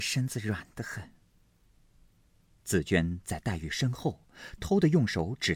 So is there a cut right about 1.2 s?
no; 1 cut; at 4.6 s

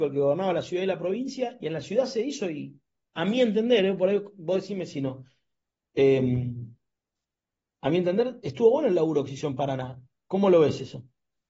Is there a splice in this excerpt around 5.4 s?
no; 0 cuts

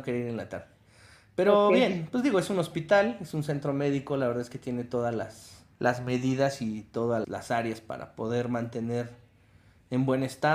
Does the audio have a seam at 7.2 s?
yes; 2 cuts; at 5.7 s, 7.2 s

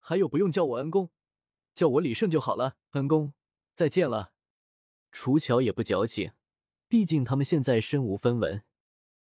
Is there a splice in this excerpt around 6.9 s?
yes; 3 cuts; at 2.9 s, 5.0 s, 6.9 s

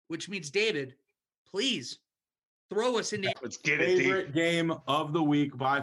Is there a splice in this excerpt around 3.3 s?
yes; 1 cut; at 3.3 s

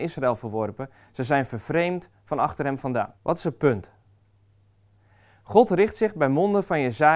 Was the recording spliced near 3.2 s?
yes; 1 cut; at 3.2 s

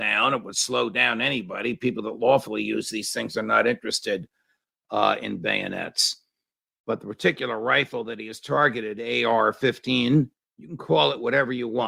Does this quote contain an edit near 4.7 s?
no; 0 cuts

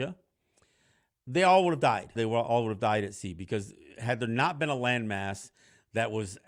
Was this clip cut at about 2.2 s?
yes; 1 cut; at 2.2 s

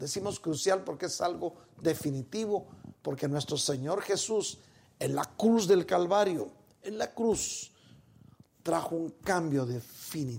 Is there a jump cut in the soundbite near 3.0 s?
no; 0 cuts

